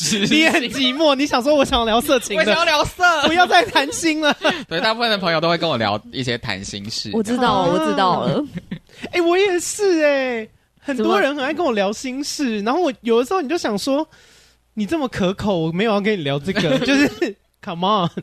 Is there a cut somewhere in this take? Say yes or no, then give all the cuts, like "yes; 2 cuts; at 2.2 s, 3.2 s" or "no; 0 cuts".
no; 0 cuts